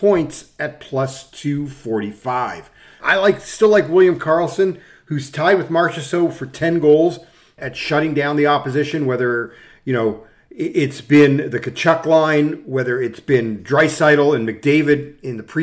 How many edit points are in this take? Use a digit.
2